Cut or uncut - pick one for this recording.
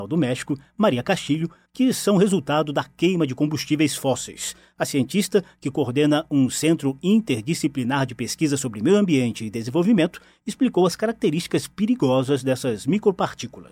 cut